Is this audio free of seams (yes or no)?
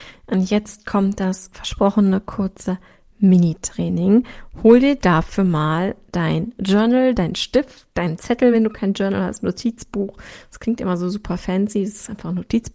yes